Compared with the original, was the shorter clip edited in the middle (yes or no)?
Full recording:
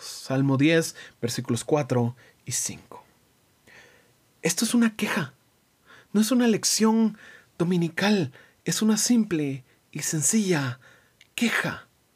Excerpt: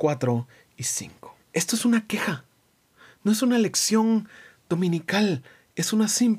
yes